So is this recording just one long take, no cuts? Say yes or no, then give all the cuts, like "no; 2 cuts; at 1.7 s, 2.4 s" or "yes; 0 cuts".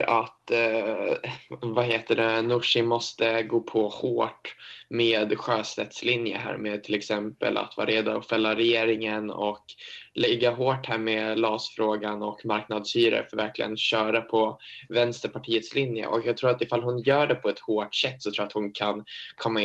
yes; 0 cuts